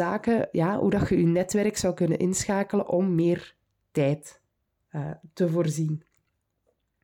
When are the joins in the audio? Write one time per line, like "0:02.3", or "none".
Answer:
none